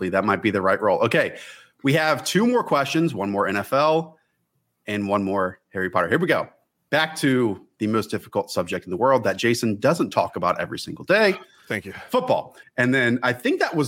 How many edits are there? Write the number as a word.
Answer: one